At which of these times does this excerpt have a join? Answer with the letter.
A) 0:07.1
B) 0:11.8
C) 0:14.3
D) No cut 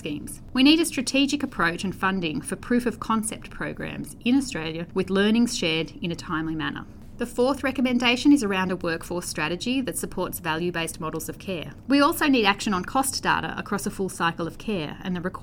B